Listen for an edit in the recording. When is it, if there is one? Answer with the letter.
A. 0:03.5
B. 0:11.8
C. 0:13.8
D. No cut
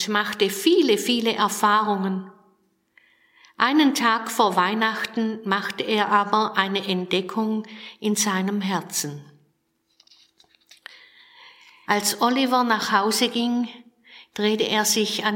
B